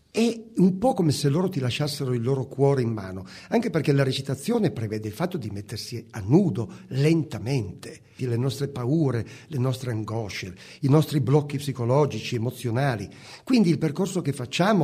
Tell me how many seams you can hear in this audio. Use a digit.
1